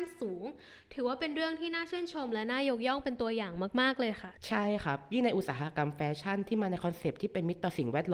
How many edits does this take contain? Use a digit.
1